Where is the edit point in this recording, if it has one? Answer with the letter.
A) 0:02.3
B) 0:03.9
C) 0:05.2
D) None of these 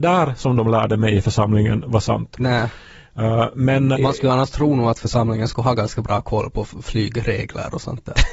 B